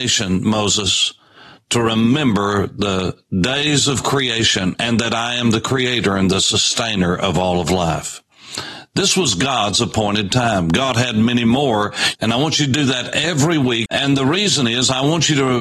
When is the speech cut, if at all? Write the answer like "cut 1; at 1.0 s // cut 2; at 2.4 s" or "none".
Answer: cut 1; at 12.1 s // cut 2; at 13.9 s